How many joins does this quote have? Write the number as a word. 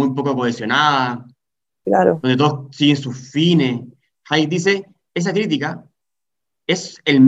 zero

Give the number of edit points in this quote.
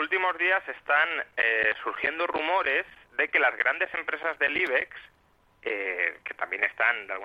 zero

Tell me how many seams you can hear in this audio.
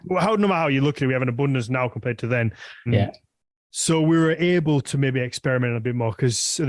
one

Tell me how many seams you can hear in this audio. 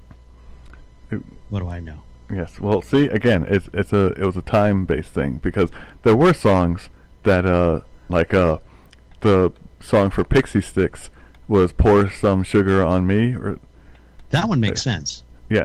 one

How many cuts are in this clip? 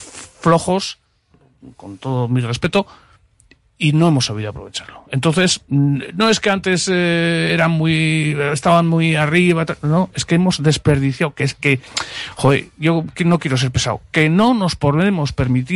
zero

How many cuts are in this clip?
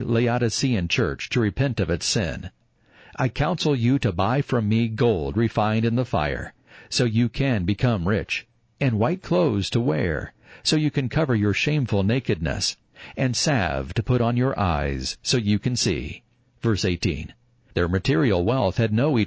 zero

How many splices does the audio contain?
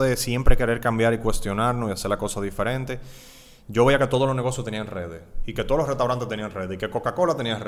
zero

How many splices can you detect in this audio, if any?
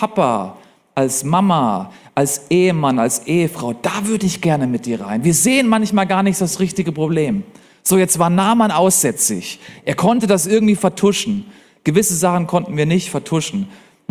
zero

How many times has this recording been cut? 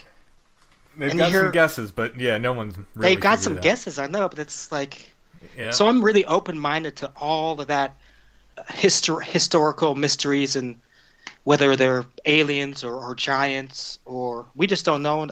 zero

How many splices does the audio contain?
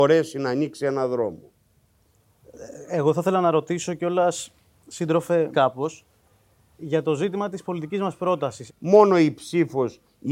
two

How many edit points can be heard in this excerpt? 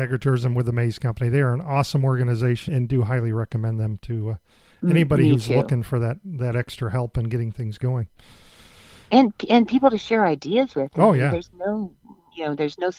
one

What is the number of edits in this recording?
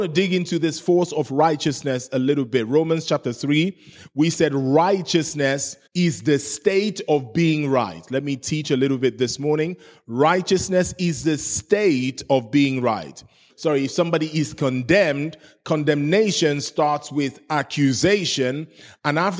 two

